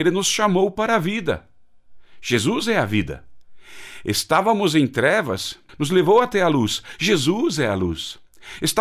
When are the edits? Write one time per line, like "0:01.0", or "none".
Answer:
0:05.7